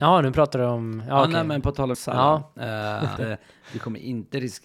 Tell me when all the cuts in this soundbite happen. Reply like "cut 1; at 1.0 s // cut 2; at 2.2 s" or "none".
cut 1; at 1.9 s // cut 2; at 3.2 s